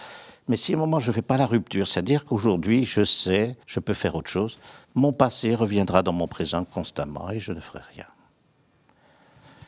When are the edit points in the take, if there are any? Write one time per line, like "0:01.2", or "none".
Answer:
0:03.6
0:04.8